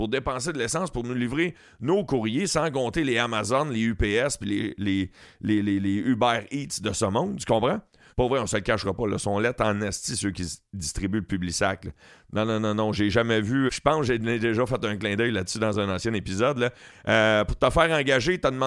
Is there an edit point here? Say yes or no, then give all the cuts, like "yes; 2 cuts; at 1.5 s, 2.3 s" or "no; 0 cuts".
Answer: yes; 3 cuts; at 8.1 s, 13.7 s, 16.9 s